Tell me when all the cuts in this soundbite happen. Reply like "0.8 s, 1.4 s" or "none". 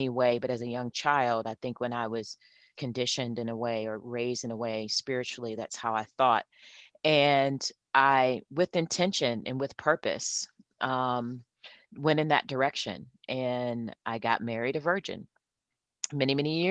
2.8 s